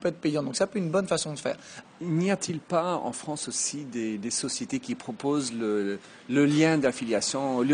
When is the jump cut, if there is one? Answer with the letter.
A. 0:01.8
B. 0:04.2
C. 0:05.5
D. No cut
A